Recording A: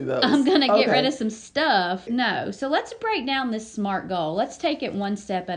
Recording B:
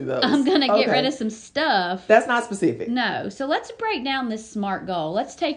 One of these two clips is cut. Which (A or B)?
A